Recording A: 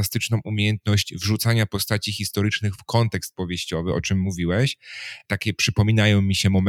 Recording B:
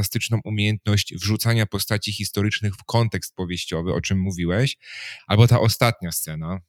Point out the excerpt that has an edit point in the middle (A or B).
B